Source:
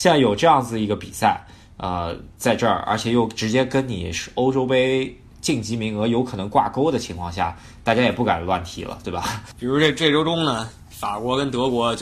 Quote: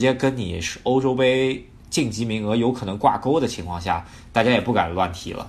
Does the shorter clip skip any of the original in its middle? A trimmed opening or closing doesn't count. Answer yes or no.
no